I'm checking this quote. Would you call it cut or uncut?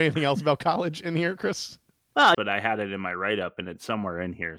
cut